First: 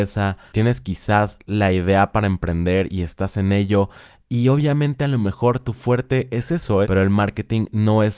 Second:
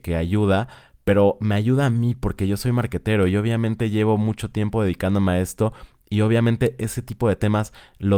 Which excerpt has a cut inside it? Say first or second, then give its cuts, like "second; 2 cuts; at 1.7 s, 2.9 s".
first; 1 cut; at 6.8 s